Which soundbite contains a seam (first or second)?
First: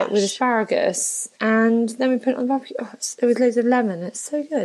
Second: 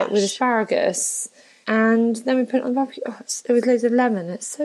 first